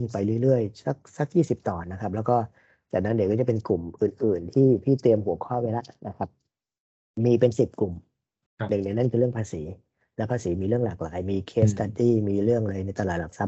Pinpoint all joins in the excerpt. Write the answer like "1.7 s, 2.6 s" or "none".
1.8 s